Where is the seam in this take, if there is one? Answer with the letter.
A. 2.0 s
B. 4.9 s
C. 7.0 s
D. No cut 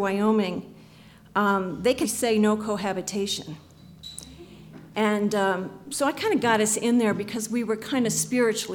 A